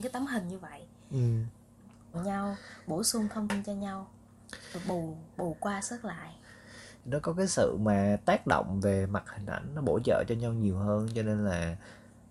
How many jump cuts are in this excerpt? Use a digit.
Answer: 1